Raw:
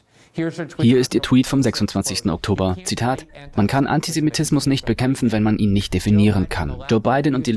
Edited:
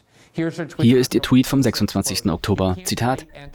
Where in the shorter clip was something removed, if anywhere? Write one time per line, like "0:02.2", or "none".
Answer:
none